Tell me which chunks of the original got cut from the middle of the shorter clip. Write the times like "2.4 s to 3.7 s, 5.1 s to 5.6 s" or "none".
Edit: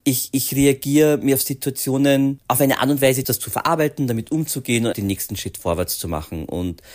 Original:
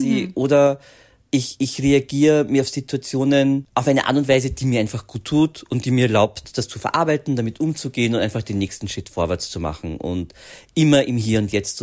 4.5 s to 6.5 s, 8.2 s to 8.4 s